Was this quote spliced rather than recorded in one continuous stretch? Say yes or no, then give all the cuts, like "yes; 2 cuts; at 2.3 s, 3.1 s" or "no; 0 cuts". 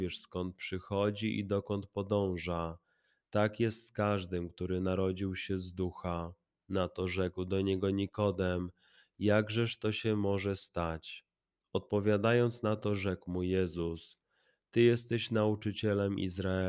no; 0 cuts